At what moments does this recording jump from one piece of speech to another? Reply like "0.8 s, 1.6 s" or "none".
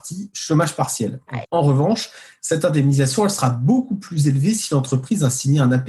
1.4 s